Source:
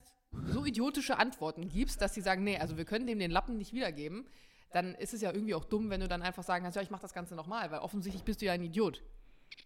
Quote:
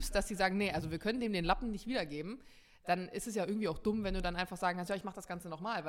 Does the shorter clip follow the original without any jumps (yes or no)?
yes